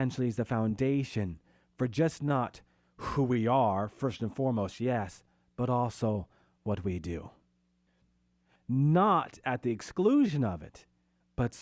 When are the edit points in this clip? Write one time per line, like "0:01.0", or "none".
0:08.6